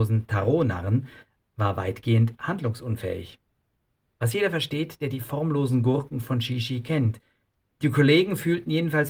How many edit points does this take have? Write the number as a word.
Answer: zero